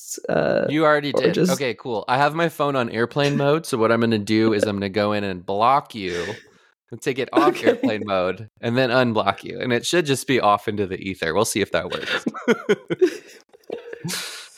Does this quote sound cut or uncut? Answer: uncut